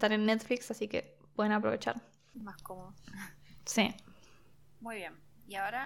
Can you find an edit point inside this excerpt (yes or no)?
no